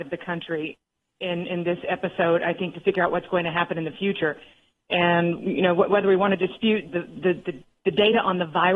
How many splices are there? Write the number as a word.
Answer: one